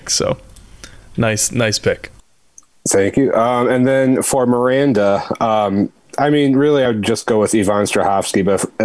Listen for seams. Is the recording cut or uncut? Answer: uncut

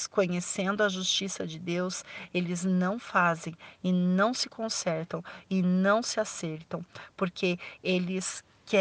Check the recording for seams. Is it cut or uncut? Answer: uncut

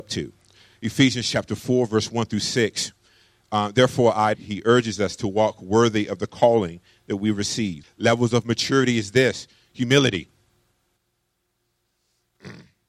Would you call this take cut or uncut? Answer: cut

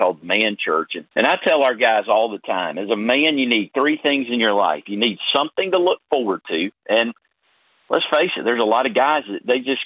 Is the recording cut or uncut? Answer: cut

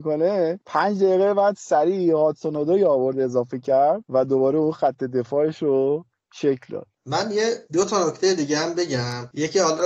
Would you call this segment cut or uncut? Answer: cut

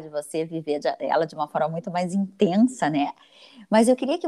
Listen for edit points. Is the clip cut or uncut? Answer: uncut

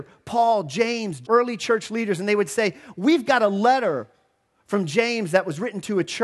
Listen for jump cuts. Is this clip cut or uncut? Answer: cut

